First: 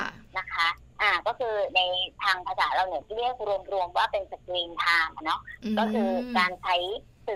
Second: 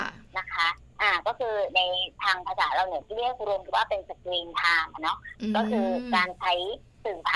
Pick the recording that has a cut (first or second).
second